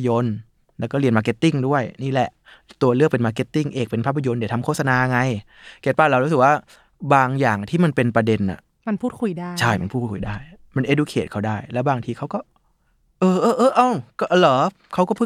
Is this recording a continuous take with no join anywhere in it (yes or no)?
yes